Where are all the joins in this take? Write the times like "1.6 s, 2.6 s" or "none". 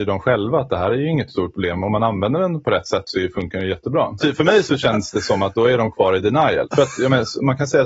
4.2 s, 6.6 s

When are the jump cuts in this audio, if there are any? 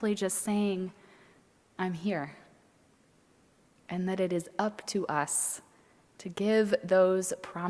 3.8 s

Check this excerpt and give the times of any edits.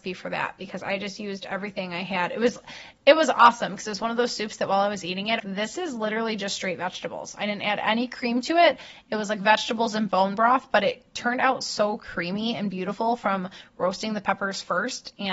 5.4 s

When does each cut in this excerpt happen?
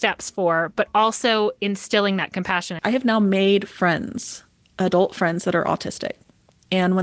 2.8 s

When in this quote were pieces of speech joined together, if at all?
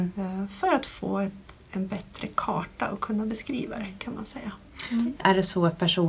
5.2 s

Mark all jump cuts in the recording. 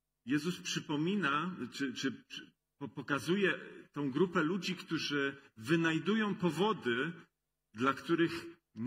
none

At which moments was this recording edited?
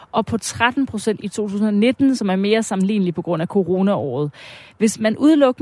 none

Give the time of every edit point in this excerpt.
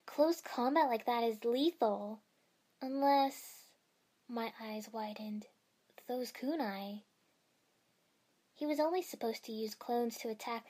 none

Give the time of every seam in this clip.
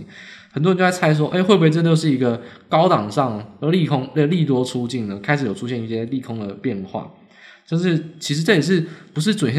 none

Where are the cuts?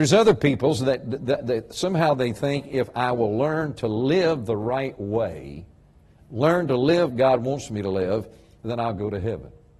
7.1 s

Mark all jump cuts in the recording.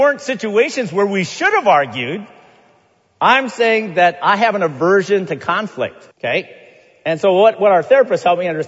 6.1 s

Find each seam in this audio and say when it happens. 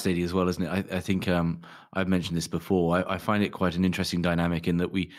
none

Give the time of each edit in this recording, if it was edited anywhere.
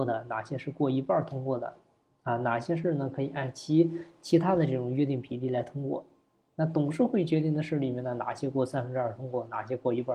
none

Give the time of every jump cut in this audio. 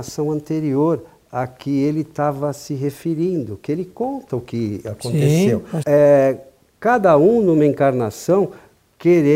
5.8 s

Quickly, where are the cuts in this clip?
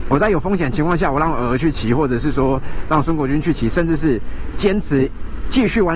none

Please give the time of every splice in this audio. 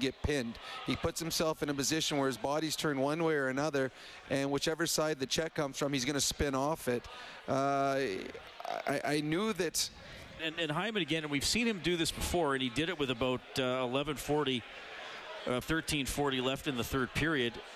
10.4 s, 15.6 s

